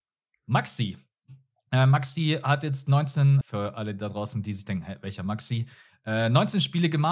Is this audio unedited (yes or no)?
no